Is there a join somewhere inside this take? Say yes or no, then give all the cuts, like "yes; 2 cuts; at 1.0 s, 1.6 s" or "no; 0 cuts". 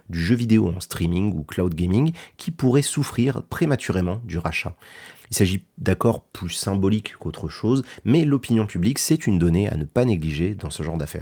yes; 1 cut; at 5.1 s